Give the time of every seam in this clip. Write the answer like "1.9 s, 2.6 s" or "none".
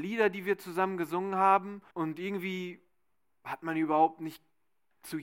1.9 s